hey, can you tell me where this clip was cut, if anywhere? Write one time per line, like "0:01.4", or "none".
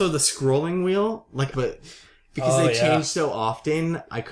0:01.5